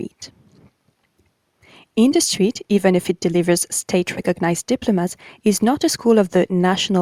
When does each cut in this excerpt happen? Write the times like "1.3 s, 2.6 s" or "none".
none